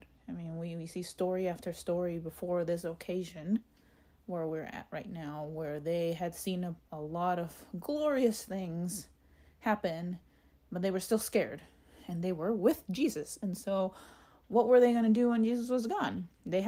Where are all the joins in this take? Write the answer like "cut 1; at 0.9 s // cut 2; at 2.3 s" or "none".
none